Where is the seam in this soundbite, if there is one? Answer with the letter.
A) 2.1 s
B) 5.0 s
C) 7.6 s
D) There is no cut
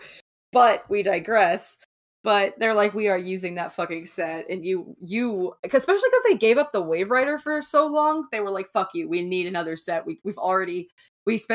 D